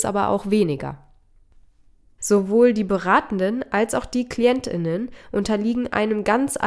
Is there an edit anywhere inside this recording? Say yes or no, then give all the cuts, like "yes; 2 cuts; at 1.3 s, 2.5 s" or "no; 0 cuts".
yes; 1 cut; at 2.2 s